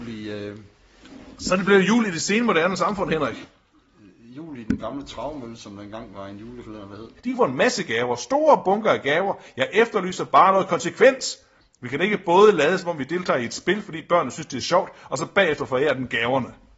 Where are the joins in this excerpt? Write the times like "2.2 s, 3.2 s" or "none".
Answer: 7.2 s